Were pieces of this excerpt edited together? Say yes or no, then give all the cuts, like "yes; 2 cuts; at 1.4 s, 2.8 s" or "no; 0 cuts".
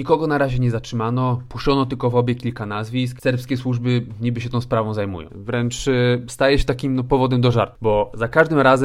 yes; 1 cut; at 5.3 s